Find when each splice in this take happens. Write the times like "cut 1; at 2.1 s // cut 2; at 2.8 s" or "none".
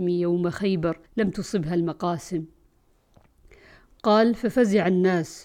cut 1; at 1.1 s